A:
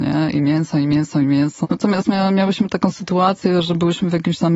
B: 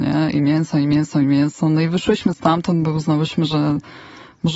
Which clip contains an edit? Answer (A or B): A